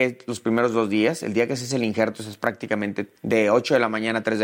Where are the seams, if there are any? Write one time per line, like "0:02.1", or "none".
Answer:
0:03.2